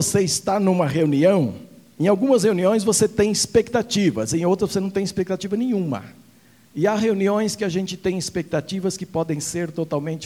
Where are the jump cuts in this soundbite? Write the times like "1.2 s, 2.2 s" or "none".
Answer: 6.7 s